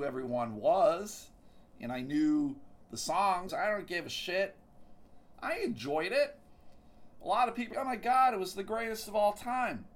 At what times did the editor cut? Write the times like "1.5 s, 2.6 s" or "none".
3.5 s, 5.3 s, 7.7 s

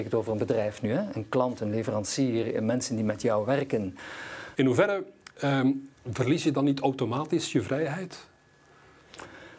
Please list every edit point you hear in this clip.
4.5 s, 5.9 s

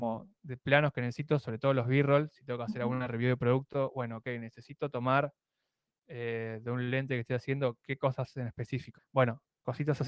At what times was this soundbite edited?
9.0 s

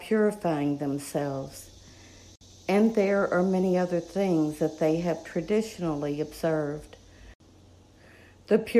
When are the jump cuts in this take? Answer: none

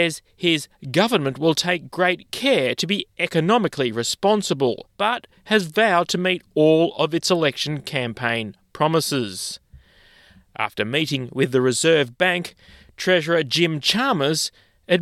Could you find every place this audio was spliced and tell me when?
4.9 s

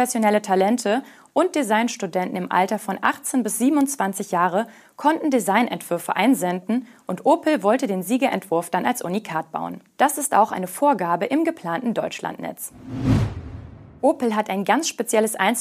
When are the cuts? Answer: 10.0 s

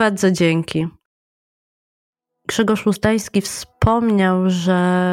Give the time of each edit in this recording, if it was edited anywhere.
none

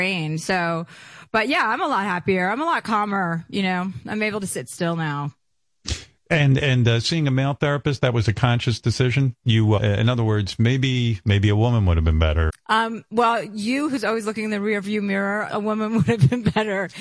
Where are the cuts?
9.8 s, 12.5 s, 15.5 s

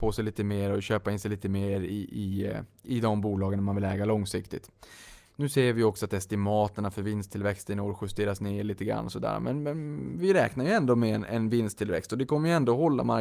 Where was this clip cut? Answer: 5.2 s

